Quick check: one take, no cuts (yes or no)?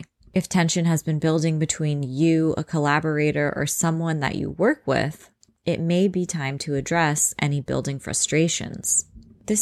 yes